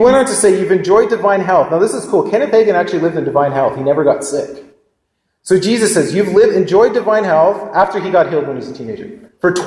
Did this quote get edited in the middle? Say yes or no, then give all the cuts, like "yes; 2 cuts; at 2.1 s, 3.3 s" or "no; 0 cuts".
no; 0 cuts